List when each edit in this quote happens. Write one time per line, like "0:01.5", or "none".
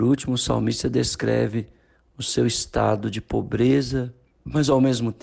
0:04.3